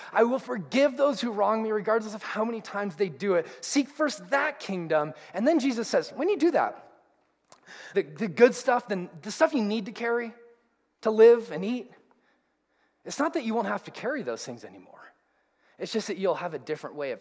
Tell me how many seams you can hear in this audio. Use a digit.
1